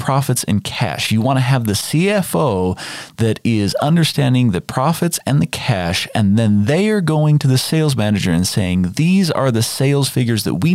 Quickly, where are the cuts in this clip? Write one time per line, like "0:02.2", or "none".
none